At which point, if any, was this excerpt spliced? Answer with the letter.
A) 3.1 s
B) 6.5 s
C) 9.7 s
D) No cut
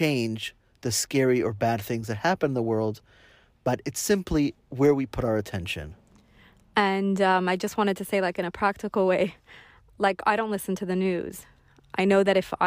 D